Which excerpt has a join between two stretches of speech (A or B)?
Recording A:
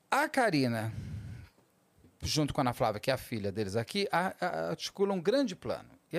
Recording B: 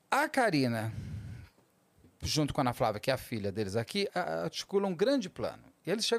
B